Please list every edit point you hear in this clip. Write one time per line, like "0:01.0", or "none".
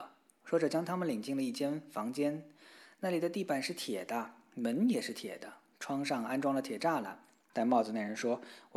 0:07.5